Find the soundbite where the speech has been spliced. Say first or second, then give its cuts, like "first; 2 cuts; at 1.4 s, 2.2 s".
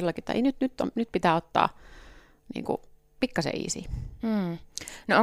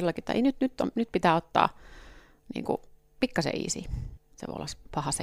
second; 1 cut; at 4.2 s